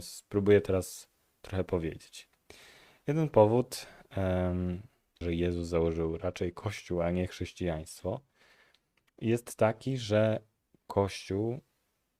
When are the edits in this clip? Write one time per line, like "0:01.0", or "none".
0:05.2